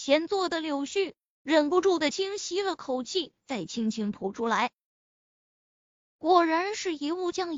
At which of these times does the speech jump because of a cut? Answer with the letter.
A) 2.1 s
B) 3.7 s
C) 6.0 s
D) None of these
A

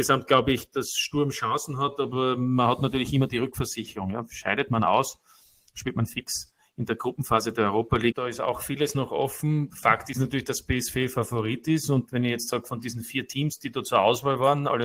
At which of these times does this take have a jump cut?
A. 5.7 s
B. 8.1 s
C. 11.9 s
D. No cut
B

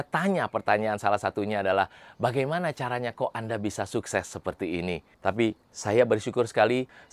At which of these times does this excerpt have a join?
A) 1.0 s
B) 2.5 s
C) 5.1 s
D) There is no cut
C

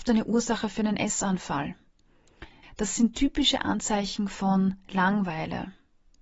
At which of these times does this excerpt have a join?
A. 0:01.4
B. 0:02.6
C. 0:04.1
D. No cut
B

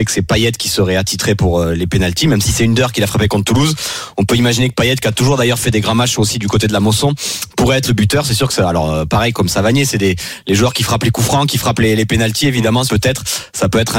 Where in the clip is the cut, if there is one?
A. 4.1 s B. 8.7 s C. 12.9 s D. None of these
C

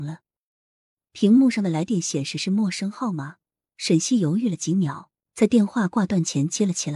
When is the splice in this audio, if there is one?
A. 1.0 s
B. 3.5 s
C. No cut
C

